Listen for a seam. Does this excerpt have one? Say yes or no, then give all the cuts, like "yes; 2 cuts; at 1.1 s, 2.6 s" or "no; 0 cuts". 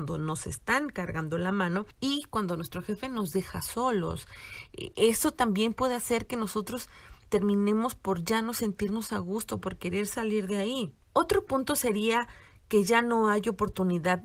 no; 0 cuts